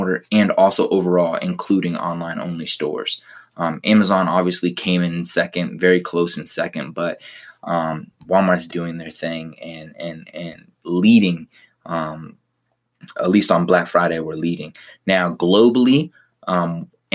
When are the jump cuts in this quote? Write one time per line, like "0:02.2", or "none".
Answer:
0:08.7

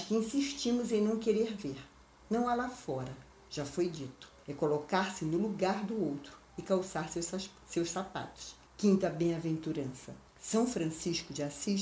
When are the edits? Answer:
0:04.4
0:08.7
0:10.3

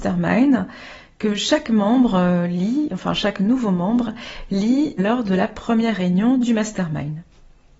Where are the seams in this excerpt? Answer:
0:05.0

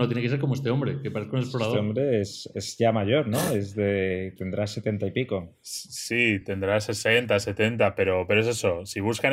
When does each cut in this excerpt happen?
none

